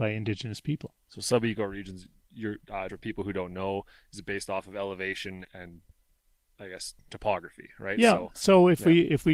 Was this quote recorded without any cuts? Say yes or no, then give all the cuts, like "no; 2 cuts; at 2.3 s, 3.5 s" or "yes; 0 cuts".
no; 2 cuts; at 2.9 s, 5.4 s